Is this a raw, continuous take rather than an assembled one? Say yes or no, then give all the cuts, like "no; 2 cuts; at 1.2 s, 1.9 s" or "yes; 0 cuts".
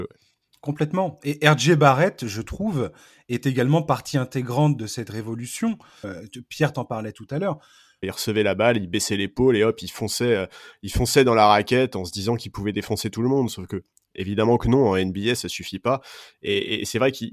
no; 2 cuts; at 6.0 s, 8.0 s